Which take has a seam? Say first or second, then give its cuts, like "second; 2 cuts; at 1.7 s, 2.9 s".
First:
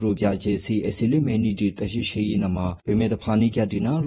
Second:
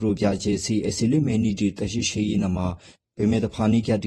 first; 1 cut; at 2.8 s